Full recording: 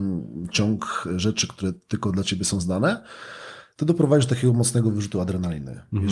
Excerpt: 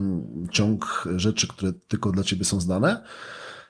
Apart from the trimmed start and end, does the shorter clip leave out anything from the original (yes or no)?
no